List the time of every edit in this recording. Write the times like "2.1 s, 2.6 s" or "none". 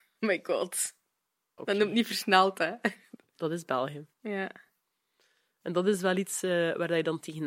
1.6 s, 4.1 s